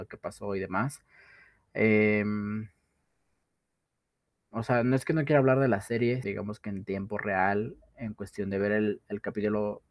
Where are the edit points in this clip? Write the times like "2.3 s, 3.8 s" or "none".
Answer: 6.2 s